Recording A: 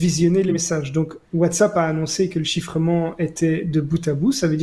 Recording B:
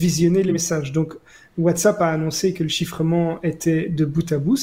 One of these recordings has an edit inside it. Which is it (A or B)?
A